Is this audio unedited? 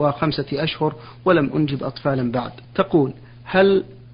no; 1 cut; at 2.6 s

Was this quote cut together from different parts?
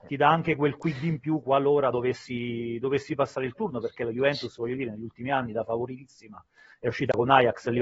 no; 0 cuts

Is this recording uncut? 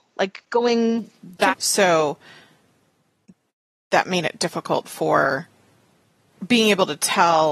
no; 1 cut; at 1.5 s

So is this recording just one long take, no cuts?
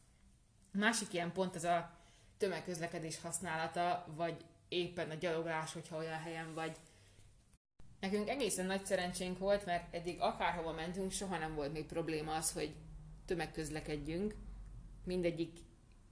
yes; 0 cuts

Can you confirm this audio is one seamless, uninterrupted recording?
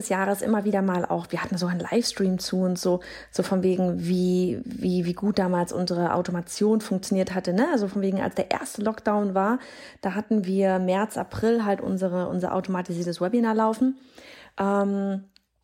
yes; 0 cuts

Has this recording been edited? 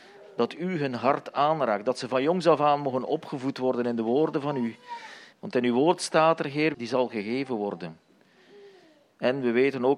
yes; 2 cuts; at 5.3 s, 6.7 s

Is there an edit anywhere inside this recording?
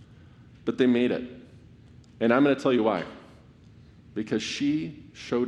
no; 0 cuts

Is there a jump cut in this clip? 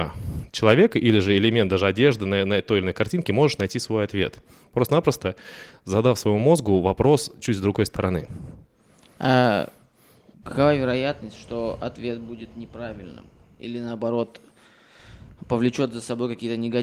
no; 0 cuts

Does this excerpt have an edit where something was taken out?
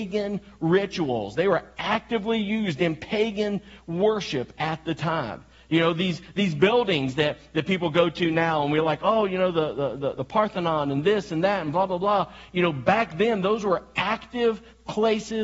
no; 0 cuts

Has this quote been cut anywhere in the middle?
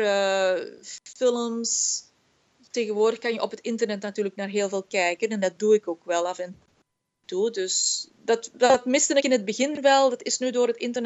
no; 0 cuts

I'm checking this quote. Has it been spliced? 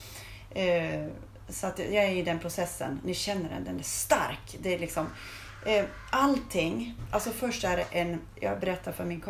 no; 0 cuts

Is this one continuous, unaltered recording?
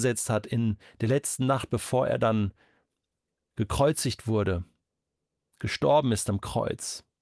yes; 0 cuts

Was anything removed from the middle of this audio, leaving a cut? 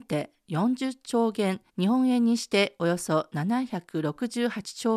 yes; 1 cut; at 1.7 s

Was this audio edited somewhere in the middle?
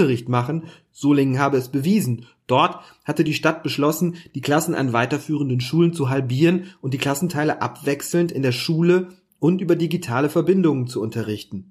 no; 0 cuts

